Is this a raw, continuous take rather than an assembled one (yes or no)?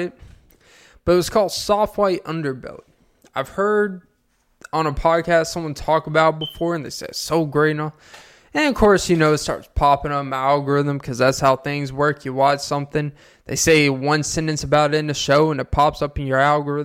yes